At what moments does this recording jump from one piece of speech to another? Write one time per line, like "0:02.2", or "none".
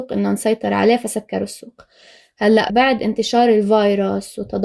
0:02.7

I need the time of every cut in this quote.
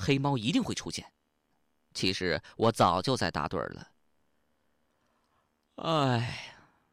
0:01.5

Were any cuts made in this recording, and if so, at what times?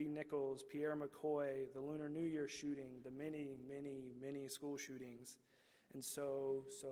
none

